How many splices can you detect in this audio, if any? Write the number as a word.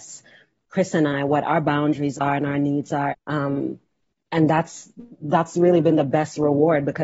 one